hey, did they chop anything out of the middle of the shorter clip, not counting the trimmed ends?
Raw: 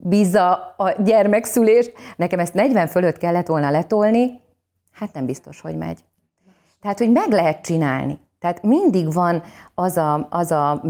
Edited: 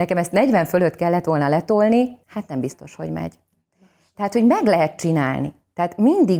yes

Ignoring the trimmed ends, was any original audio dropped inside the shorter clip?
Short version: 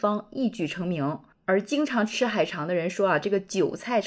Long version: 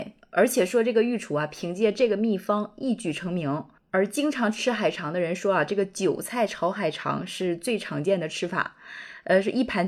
no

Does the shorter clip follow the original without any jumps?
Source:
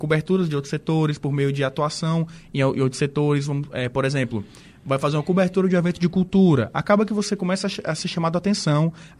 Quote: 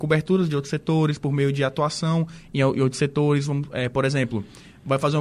yes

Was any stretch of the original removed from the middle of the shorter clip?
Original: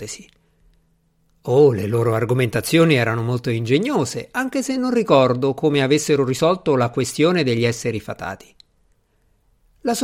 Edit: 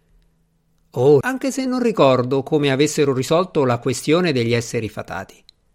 yes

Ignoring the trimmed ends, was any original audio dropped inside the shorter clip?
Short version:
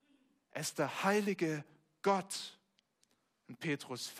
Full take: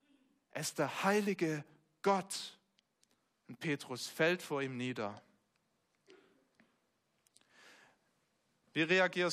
no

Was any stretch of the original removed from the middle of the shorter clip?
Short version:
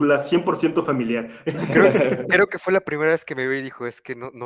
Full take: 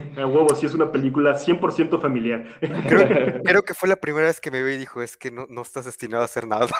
no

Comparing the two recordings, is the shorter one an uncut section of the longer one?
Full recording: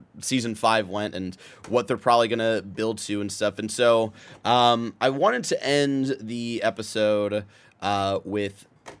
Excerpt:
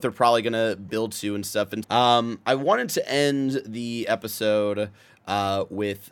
no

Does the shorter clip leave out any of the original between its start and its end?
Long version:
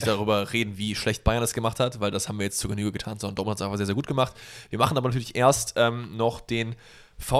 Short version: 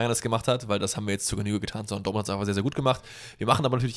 no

